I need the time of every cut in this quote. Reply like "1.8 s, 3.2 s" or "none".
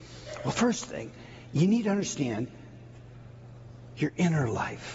4.0 s

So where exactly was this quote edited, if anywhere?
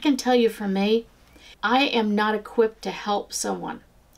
1.5 s

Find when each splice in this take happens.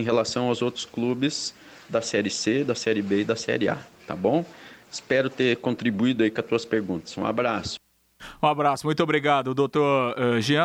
none

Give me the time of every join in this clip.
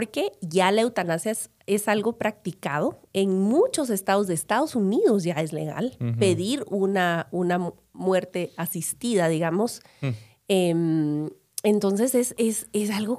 none

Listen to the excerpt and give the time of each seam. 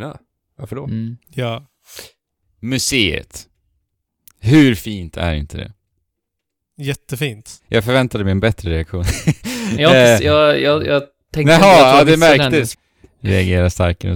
7.6 s, 12.7 s

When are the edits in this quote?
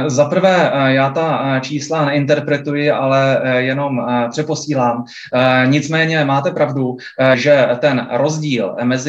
7.3 s

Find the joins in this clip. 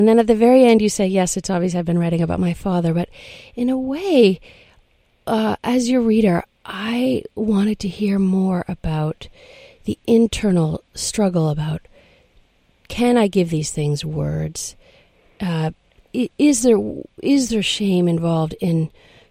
none

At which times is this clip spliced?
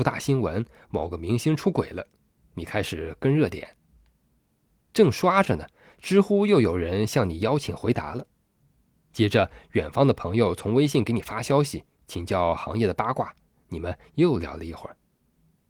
none

